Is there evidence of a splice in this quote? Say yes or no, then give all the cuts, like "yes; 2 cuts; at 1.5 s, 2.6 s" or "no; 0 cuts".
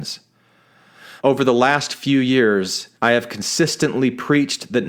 yes; 2 cuts; at 1.2 s, 2.9 s